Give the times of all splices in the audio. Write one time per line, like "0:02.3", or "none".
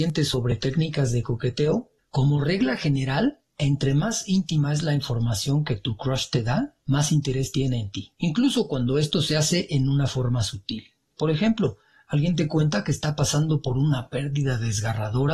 none